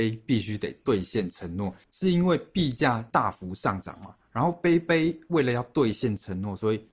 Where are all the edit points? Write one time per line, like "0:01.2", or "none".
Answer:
0:01.8